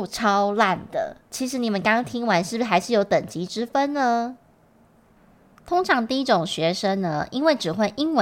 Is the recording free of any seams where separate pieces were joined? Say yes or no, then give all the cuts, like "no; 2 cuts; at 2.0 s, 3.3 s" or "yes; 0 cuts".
no; 1 cut; at 1.2 s